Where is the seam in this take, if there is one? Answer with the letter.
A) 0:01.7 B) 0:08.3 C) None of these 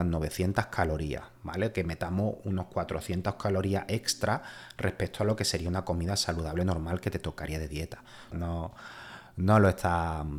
B